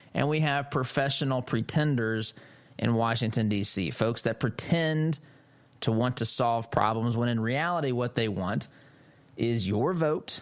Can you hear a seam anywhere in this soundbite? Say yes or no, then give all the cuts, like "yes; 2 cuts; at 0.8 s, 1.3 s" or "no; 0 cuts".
no; 0 cuts